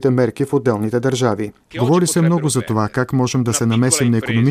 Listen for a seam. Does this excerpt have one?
yes; 1 cut; at 1.7 s

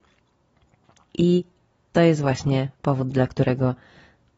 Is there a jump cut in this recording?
yes; 1 cut; at 1.1 s

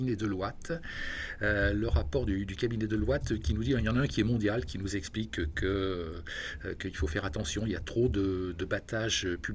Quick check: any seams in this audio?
no; 0 cuts

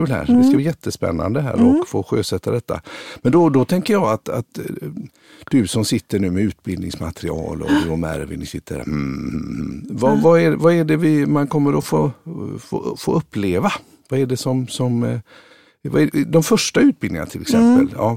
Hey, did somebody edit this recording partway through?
no; 0 cuts

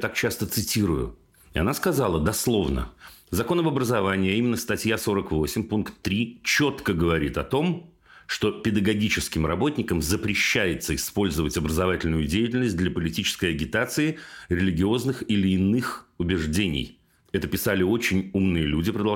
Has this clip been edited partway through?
no; 0 cuts

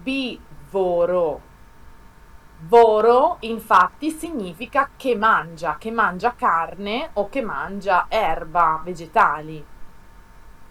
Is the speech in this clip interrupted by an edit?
no; 0 cuts

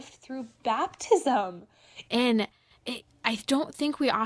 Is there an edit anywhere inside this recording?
yes; 1 cut; at 2.1 s

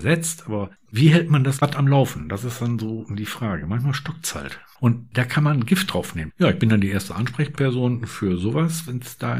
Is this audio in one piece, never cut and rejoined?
no; 2 cuts; at 4.8 s, 6.3 s

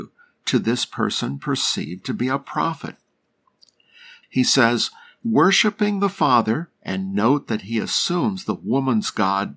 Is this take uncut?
no; 2 cuts; at 4.2 s, 6.7 s

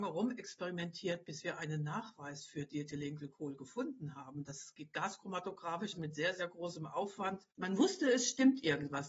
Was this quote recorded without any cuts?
no; 2 cuts; at 5.9 s, 7.5 s

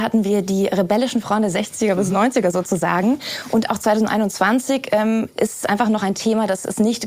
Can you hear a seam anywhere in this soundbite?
no; 0 cuts

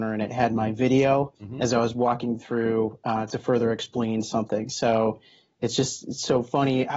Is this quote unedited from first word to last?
yes; 0 cuts

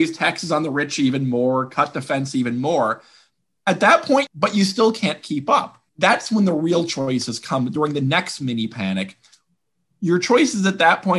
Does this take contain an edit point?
yes; 2 cuts; at 4.3 s, 5.9 s

